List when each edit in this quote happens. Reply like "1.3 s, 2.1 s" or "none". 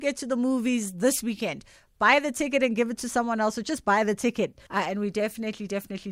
4.7 s